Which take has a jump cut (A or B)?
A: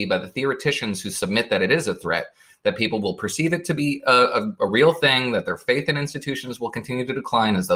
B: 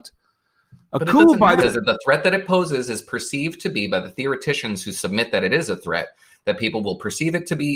B